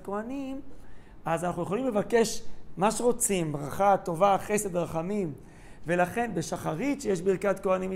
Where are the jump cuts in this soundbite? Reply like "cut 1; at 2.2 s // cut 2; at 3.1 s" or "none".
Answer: none